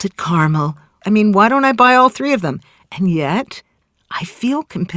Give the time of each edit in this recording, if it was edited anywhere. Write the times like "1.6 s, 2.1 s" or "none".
1.0 s